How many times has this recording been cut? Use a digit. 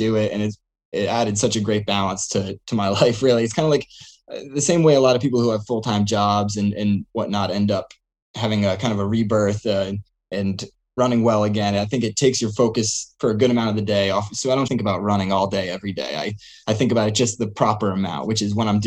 1